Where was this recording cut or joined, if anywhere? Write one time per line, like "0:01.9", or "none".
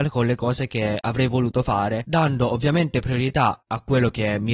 0:03.6